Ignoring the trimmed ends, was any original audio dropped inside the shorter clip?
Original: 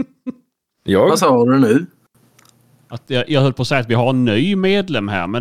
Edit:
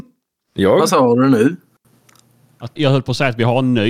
yes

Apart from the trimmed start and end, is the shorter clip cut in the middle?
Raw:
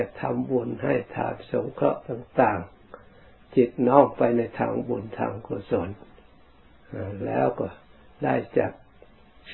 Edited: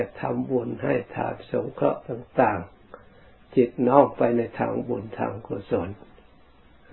no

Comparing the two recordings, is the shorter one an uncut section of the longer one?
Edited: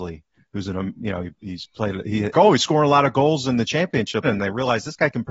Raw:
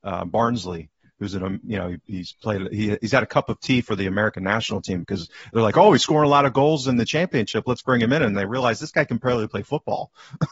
no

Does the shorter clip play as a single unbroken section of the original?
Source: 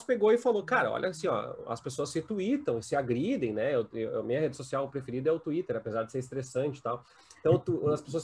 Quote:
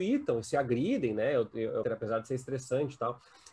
no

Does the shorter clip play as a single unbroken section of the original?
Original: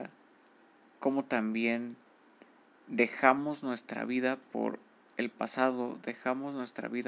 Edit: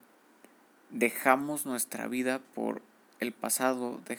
yes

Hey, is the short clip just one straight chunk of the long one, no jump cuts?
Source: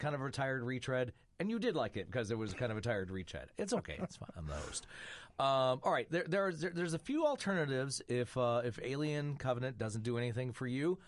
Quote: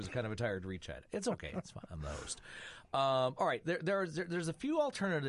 yes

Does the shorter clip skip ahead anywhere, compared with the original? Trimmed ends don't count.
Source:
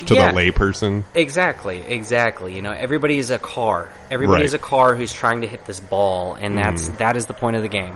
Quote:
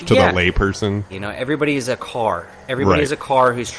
yes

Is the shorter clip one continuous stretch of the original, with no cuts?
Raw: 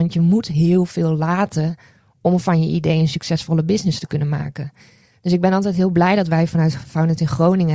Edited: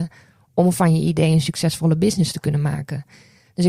yes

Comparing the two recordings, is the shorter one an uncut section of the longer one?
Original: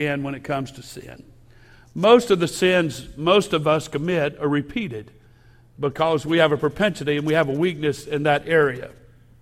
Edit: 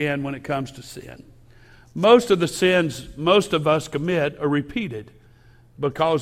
yes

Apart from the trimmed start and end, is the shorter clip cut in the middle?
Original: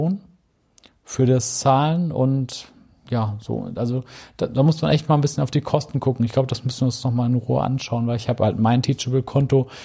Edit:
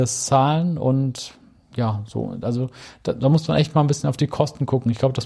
no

